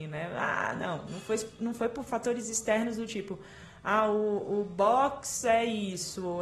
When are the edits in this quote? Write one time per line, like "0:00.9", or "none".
none